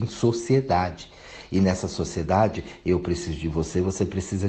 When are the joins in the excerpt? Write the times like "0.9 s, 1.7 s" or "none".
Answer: none